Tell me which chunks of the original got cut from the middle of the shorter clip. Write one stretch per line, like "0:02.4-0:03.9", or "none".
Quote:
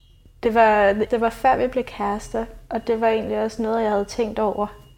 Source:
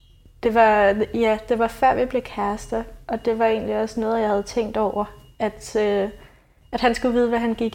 0:01.1-0:01.4